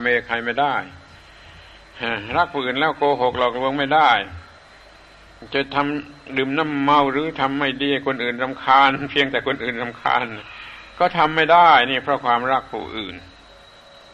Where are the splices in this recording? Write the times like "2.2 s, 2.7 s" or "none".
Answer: none

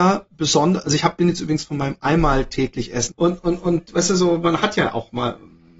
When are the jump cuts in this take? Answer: 3.1 s

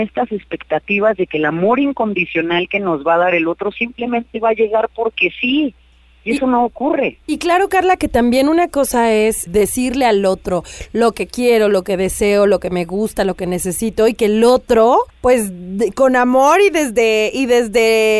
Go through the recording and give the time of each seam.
9.5 s, 15.1 s

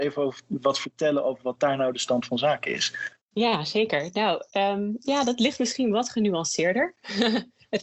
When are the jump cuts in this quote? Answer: 3.2 s

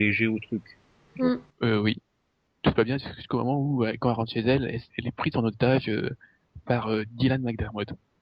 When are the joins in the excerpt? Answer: 1.5 s, 4.9 s

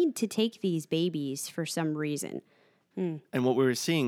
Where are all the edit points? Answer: 2.9 s

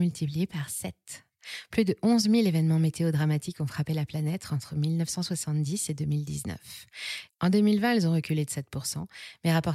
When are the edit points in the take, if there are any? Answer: 7.3 s

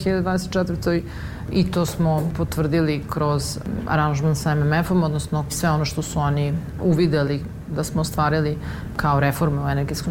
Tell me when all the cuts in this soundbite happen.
4.4 s

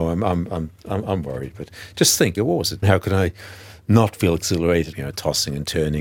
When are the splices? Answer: 2.8 s, 4.9 s

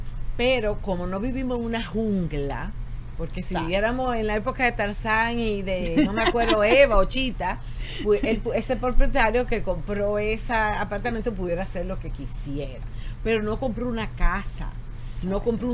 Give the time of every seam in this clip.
none

